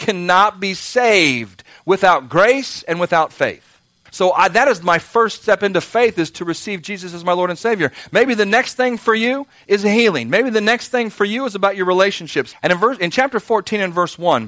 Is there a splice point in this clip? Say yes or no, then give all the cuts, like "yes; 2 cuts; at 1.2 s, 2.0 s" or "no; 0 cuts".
yes; 2 cuts; at 4.1 s, 12.5 s